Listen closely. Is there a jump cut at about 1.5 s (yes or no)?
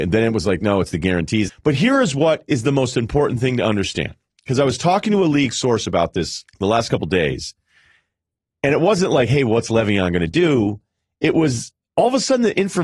yes